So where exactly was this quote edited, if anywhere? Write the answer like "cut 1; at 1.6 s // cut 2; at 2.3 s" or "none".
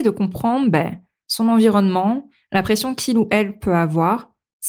none